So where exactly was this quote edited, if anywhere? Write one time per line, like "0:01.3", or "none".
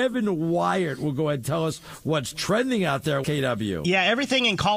0:03.2